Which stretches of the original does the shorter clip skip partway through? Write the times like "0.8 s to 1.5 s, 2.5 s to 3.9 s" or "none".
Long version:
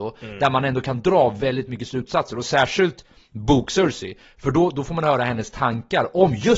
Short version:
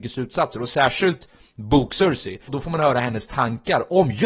4.2 s to 4.7 s